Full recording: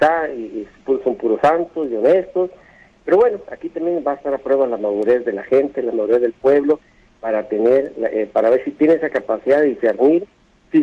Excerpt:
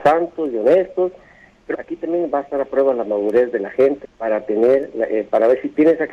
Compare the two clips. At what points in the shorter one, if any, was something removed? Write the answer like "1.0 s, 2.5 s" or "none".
1.7 s, 4.0 s

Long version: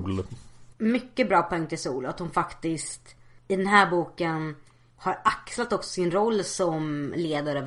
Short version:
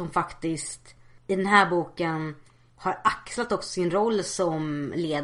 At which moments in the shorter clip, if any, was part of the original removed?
none

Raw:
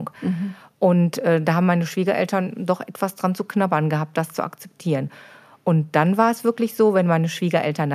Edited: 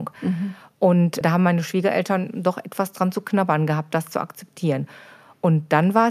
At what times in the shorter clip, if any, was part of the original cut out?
1.2 s

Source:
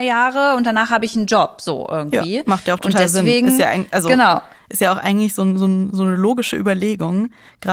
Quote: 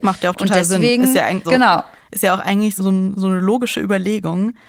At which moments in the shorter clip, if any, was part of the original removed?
1.4 s, 2.8 s

